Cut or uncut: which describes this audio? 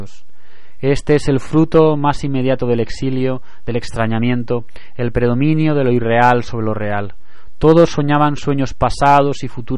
uncut